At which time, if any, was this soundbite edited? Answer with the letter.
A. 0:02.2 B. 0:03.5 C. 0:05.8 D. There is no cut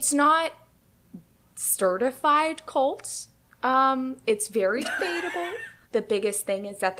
C